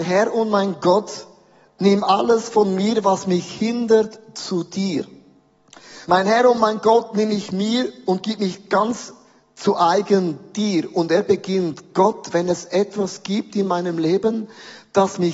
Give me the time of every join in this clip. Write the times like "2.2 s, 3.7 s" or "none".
6.0 s

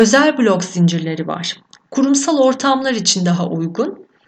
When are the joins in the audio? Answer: 1.8 s

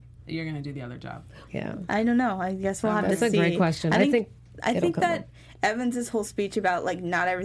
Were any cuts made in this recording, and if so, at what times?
1.5 s, 4.5 s

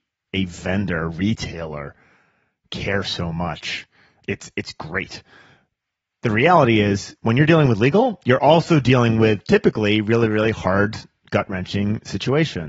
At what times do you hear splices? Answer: none

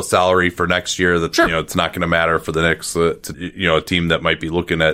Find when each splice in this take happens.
3.3 s

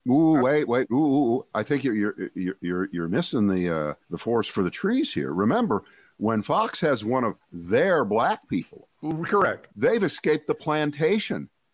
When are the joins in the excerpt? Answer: 4.0 s, 9.7 s

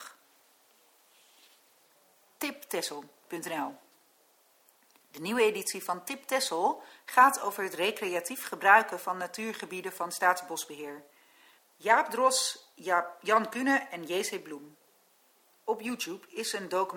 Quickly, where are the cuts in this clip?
11.6 s

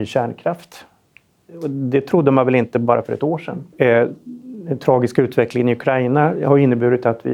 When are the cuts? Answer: 3.7 s

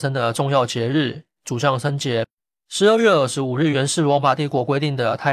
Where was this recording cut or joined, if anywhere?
1.4 s

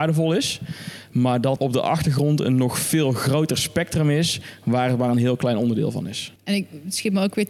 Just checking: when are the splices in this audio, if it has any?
1.6 s, 6.4 s

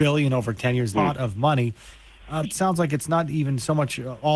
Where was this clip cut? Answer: 0.9 s, 2.4 s

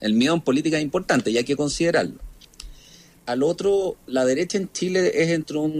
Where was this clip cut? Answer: 3.2 s

